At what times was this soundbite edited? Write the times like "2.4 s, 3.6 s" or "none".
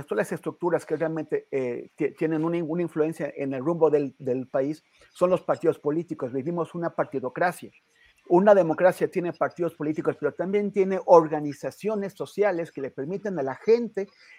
8.1 s